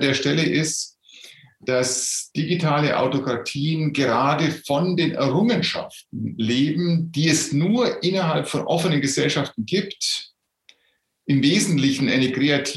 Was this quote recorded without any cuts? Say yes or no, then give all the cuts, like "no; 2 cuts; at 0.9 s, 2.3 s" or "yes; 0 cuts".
yes; 0 cuts